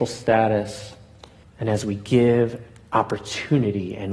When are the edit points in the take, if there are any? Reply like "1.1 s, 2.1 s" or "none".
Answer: 1.4 s